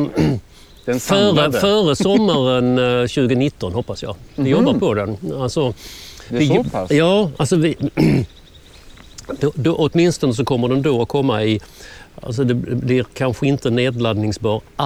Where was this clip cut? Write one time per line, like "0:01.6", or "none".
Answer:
none